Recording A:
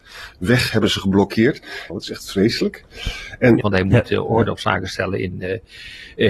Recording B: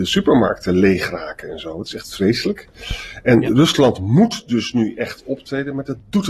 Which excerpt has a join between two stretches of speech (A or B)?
A